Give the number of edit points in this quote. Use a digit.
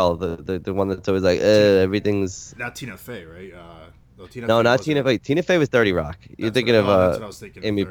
0